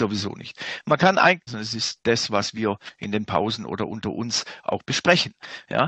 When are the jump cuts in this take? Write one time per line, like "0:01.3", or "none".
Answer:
0:01.5